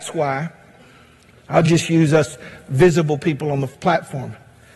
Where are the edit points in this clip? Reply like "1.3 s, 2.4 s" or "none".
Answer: none